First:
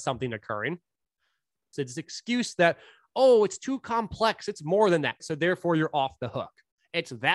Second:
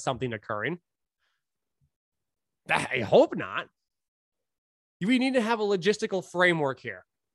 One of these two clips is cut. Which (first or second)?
first